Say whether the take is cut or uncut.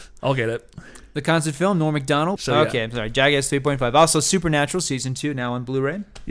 cut